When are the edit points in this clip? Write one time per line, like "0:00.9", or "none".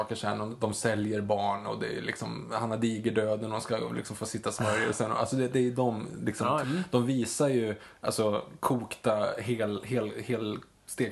0:06.6

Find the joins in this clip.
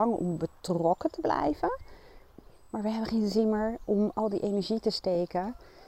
none

